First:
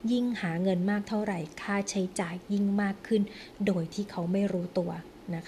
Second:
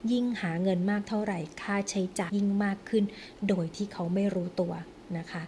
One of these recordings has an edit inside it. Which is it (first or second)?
second